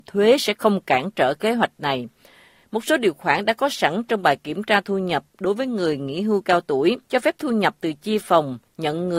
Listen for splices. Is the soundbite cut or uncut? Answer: cut